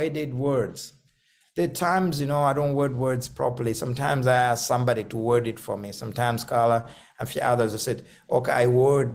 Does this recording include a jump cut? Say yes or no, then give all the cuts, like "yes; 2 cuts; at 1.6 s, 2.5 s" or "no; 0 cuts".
no; 0 cuts